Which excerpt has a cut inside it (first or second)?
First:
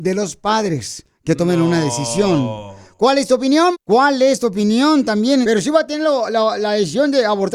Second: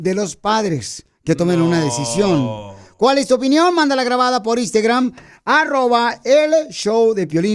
first